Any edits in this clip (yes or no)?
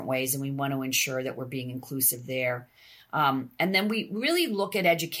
no